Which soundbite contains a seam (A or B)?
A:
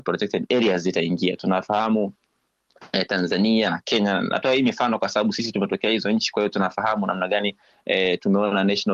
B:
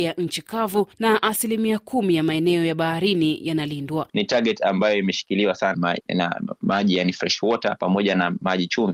B